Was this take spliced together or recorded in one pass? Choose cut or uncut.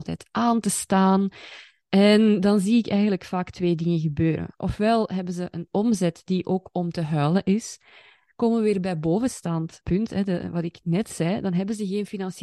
cut